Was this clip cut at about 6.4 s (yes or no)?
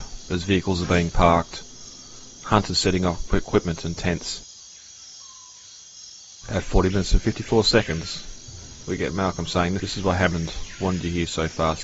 no